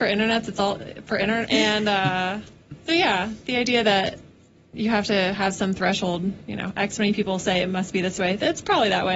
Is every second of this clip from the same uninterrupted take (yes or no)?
no